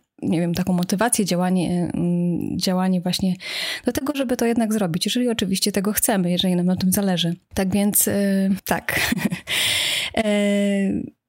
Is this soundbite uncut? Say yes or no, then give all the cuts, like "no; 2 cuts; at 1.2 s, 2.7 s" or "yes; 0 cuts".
yes; 0 cuts